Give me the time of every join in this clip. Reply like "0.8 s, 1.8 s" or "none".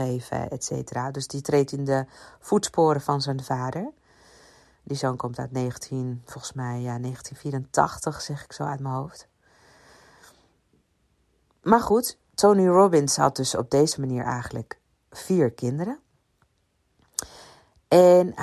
none